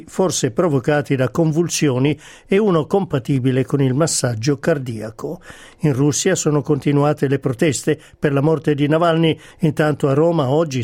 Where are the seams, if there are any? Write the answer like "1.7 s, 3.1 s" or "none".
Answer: 9.5 s